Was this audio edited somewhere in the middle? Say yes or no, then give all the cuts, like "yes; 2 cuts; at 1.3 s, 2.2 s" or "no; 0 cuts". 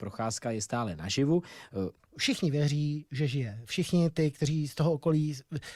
yes; 1 cut; at 2.1 s